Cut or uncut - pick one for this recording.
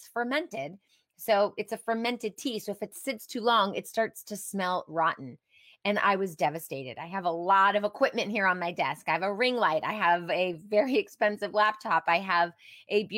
uncut